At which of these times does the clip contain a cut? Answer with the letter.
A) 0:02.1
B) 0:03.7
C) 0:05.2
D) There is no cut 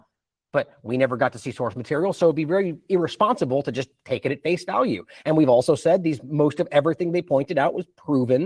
D